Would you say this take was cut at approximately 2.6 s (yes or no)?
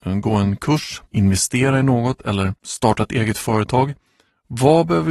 yes